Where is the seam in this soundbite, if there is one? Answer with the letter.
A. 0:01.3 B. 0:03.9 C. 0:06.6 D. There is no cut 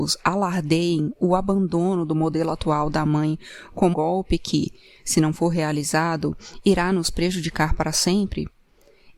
B